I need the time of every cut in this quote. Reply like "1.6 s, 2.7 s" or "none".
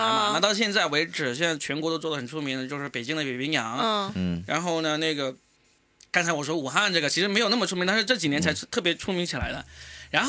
none